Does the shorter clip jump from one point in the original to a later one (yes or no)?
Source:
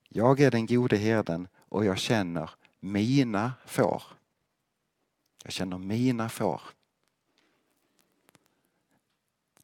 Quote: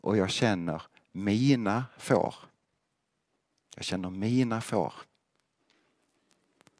no